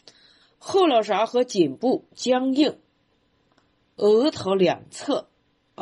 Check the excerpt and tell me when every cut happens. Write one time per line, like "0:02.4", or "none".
none